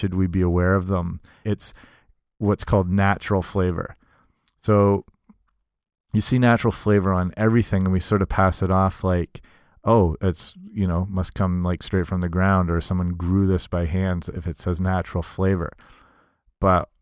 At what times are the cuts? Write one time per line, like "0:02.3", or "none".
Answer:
0:01.4